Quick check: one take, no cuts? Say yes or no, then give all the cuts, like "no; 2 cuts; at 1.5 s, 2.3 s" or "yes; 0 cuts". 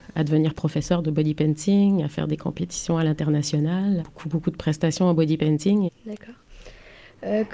no; 2 cuts; at 4.0 s, 5.9 s